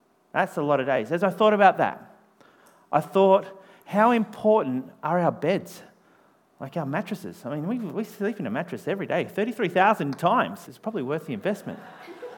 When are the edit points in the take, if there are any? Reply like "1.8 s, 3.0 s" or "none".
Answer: 10.7 s